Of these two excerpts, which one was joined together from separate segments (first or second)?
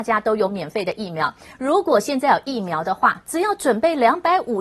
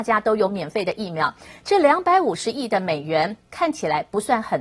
first